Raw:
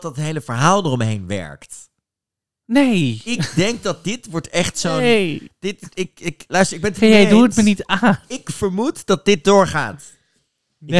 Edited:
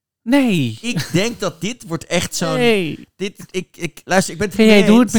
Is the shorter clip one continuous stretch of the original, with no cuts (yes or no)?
yes